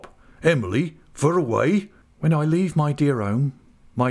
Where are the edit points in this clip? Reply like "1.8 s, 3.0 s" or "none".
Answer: 2.0 s